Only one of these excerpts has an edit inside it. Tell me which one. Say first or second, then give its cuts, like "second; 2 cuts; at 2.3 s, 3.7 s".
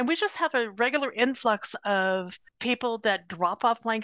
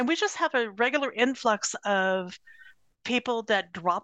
first; 1 cut; at 2.5 s